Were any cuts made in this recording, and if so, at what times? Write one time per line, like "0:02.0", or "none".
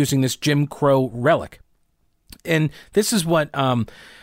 none